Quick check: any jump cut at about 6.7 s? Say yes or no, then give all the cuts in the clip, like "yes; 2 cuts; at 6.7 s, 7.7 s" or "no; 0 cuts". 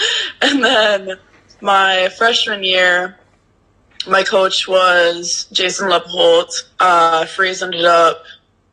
yes; 1 cut; at 6.7 s